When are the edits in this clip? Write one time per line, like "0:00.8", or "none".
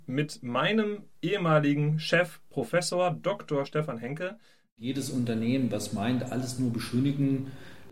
none